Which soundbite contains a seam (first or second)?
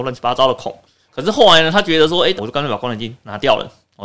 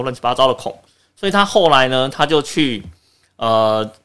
first